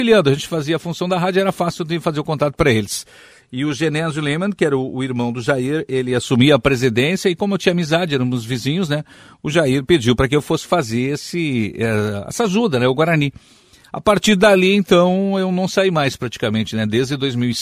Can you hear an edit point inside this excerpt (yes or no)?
no